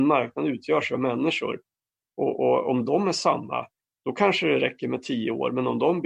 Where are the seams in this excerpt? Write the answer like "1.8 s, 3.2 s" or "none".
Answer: none